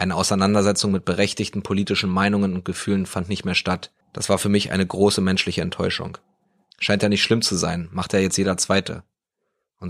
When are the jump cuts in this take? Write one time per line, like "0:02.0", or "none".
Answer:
0:04.0
0:06.7